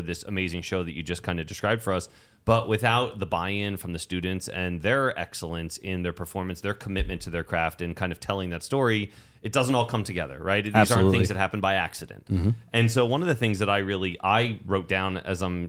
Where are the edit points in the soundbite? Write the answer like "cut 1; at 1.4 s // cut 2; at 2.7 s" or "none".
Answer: none